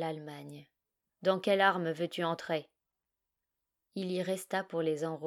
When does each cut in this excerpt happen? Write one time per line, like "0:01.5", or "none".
0:01.1
0:03.8